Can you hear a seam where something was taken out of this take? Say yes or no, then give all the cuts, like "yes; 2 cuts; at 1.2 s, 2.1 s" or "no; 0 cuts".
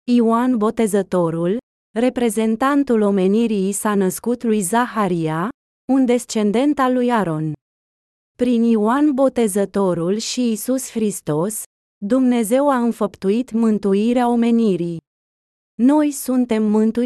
no; 0 cuts